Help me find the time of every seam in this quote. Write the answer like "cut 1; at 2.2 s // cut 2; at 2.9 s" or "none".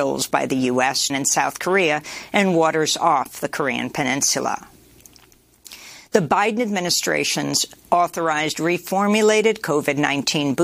cut 1; at 1.1 s